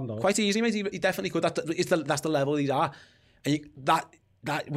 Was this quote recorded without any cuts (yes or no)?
yes